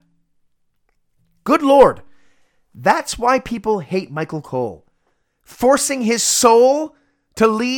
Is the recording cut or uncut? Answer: uncut